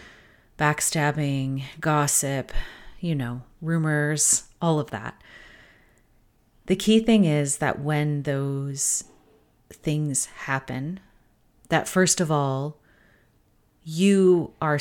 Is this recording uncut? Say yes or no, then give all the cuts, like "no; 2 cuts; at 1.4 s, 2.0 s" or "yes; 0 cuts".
yes; 0 cuts